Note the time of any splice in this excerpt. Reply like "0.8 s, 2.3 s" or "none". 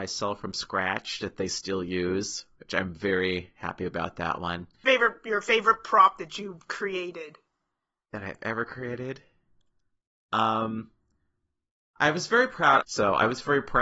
4.8 s, 12.8 s